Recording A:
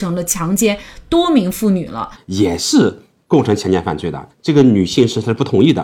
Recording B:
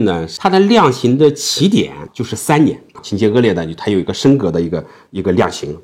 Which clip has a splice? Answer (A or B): A